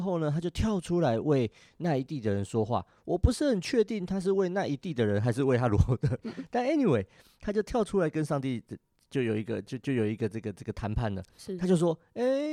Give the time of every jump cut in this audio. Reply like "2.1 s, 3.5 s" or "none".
6.2 s